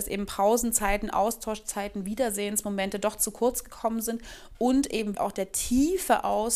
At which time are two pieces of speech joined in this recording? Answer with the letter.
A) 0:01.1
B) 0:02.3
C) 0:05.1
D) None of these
C